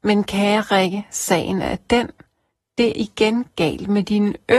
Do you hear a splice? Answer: yes; 1 cut; at 2.9 s

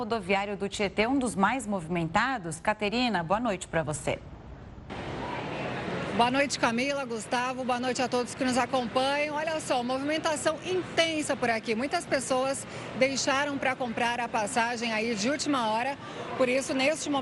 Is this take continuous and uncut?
yes; 0 cuts

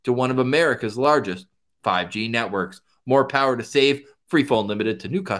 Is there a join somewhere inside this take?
yes; 1 cut; at 4.2 s

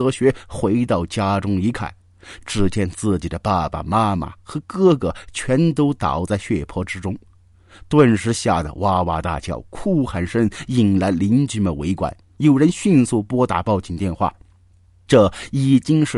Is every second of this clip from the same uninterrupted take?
yes; 0 cuts

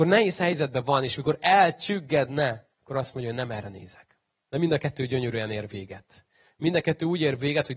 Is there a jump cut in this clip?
yes; 2 cuts; at 2.7 s, 4.4 s

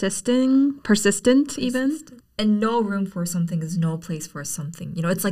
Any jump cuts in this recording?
yes; 1 cut; at 2.2 s

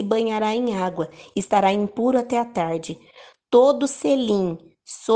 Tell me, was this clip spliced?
no; 0 cuts

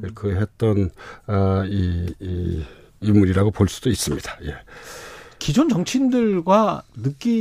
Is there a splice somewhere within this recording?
no; 0 cuts

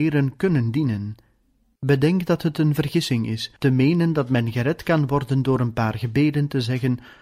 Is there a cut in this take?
yes; 2 cuts; at 1.8 s, 3.6 s

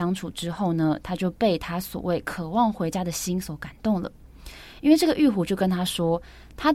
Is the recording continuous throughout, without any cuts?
yes; 0 cuts

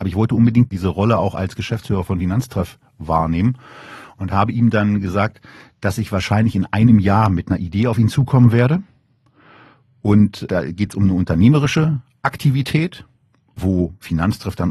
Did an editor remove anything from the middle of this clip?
no; 0 cuts

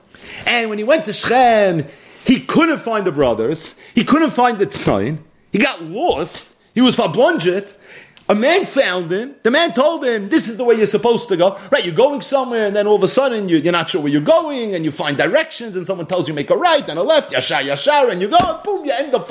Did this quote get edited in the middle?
no; 0 cuts

